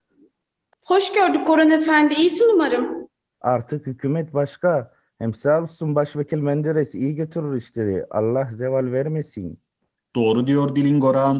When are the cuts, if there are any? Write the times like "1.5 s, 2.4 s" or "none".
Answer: 3.4 s